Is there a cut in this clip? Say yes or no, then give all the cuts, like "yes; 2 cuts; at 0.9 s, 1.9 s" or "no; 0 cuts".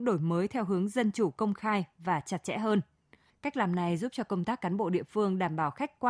yes; 1 cut; at 3.3 s